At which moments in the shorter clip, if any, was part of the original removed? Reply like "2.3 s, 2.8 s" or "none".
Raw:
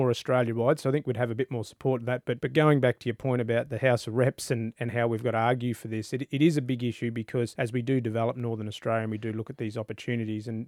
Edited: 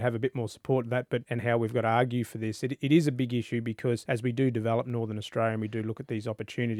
1.2 s